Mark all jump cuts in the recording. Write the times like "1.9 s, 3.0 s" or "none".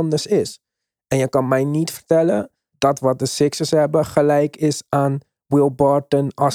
2.7 s